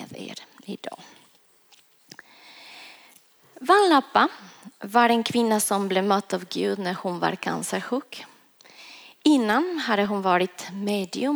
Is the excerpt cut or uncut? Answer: uncut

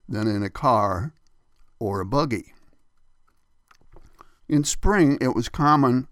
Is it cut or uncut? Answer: cut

